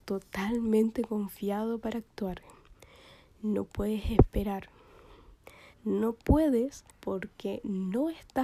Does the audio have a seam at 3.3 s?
no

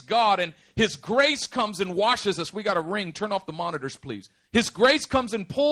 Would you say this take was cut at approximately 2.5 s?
no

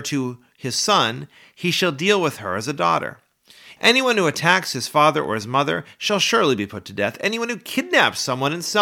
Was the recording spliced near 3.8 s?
yes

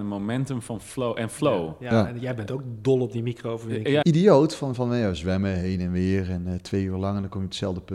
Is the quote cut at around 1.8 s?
no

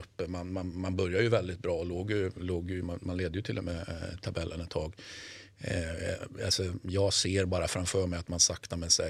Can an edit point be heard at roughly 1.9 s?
no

